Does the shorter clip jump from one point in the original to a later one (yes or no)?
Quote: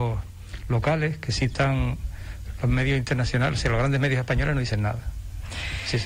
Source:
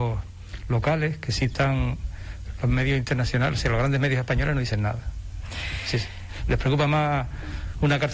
no